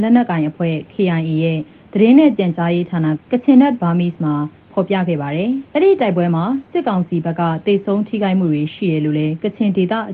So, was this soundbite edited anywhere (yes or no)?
yes